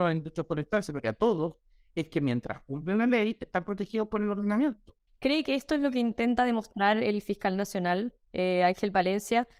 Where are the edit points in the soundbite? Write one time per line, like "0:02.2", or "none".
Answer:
0:05.1